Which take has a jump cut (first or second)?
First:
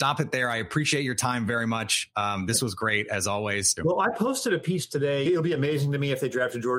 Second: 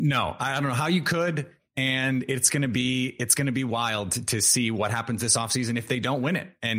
first